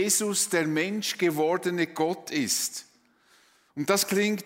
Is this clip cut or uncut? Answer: uncut